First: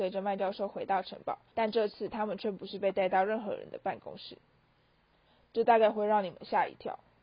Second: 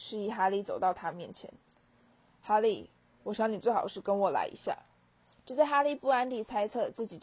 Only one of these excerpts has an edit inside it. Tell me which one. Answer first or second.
first